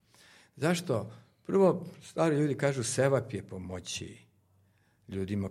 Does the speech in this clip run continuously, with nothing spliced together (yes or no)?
yes